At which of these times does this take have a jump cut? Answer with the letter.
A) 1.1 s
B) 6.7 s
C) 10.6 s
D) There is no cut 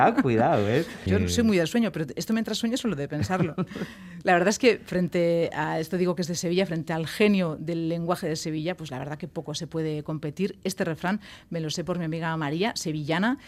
A